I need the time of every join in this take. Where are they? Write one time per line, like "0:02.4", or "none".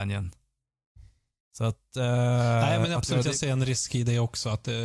0:01.4